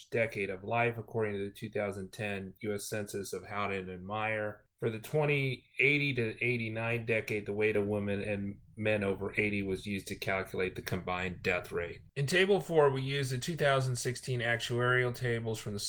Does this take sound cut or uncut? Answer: uncut